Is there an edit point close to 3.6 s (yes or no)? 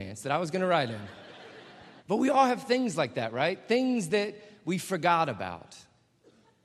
no